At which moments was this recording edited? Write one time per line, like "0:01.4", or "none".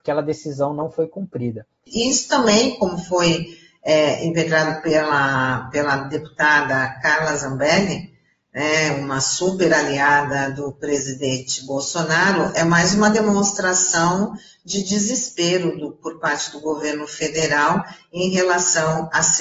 0:01.9